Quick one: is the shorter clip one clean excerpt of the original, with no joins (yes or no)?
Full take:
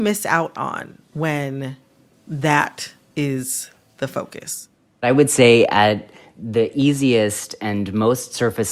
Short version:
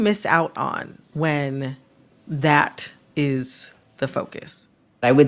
yes